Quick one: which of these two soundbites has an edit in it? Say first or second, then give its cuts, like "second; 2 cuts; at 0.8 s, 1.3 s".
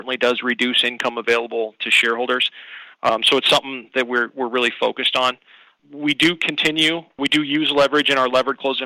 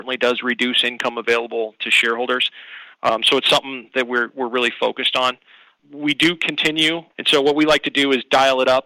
second; 1 cut; at 7.1 s